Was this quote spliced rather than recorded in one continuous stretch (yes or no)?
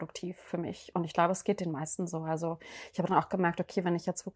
no